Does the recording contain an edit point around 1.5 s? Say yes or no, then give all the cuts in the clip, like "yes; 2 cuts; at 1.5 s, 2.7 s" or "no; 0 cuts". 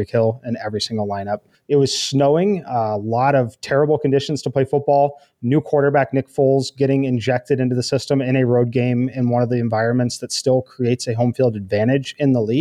yes; 1 cut; at 1.5 s